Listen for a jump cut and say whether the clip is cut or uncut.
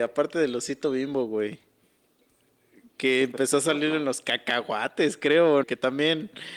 cut